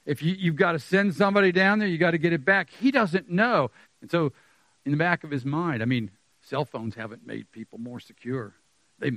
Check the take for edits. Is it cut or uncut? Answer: cut